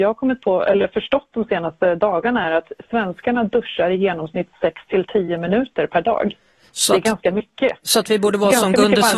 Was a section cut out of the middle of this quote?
no; 0 cuts

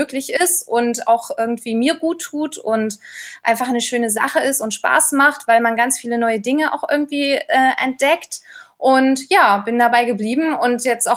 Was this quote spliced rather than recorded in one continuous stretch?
no; 0 cuts

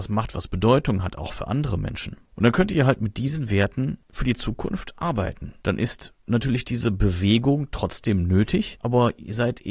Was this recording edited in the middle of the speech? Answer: yes; 1 cut; at 5.6 s

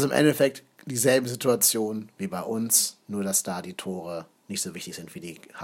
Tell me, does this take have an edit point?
no; 0 cuts

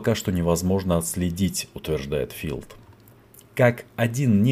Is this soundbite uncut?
yes; 0 cuts

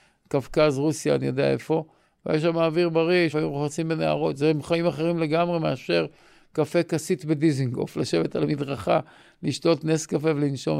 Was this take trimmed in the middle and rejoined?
yes; 1 cut; at 3.3 s

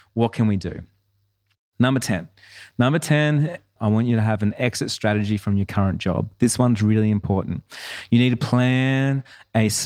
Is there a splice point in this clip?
yes; 1 cut; at 3.8 s

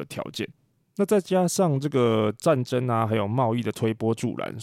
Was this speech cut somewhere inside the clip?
no; 0 cuts

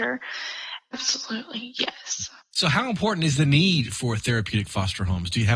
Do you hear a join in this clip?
yes; 1 cut; at 0.9 s

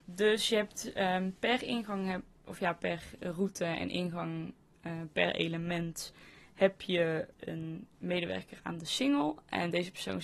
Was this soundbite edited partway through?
no; 0 cuts

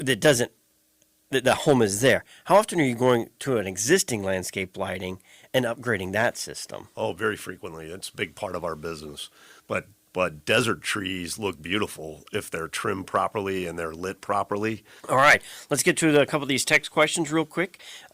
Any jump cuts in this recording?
yes; 2 cuts; at 9.6 s, 15.0 s

